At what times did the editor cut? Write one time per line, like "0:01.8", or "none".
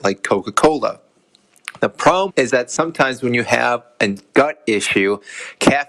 0:02.3